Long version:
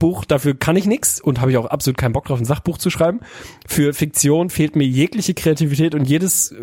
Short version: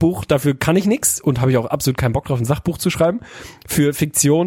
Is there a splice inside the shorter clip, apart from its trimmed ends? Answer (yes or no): no